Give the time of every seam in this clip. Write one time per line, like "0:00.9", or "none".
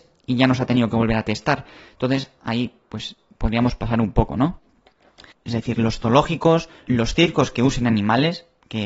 0:05.3
0:06.9

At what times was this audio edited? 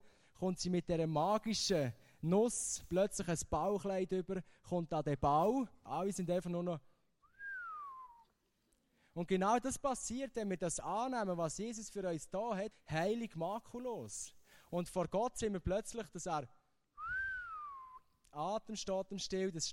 0:05.9
0:12.7

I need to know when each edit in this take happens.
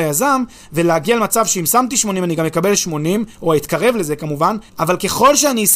0:04.7

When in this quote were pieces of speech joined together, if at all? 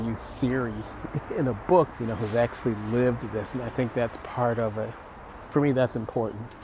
0:01.9

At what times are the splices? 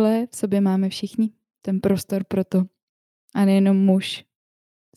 0:03.2

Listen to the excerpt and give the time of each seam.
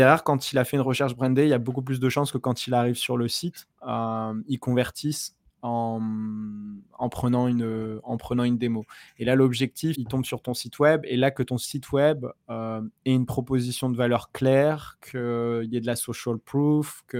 0:09.9

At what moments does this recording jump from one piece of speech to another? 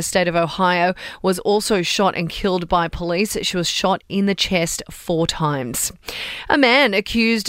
none

